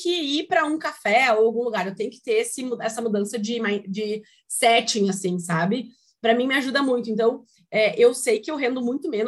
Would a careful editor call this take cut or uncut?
uncut